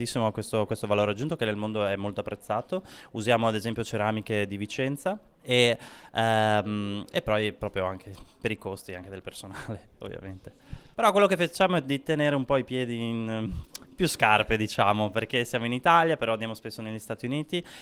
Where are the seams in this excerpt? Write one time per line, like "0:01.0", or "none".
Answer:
0:10.9